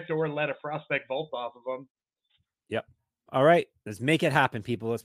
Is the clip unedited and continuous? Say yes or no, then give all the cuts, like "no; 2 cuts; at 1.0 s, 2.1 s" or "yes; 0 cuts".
no; 1 cut; at 3.3 s